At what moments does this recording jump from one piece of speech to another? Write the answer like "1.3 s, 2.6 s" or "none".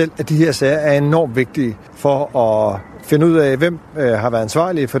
1.9 s